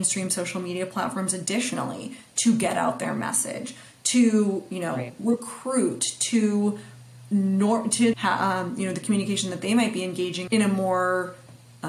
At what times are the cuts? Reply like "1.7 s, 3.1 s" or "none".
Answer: 8.1 s, 10.5 s